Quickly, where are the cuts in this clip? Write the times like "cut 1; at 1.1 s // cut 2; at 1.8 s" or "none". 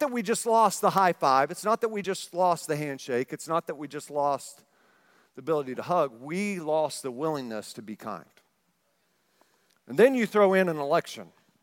none